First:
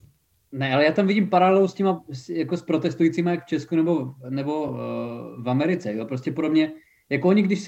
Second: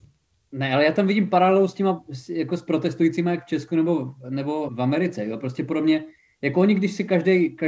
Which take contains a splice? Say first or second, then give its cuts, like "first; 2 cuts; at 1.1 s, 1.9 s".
second; 1 cut; at 4.7 s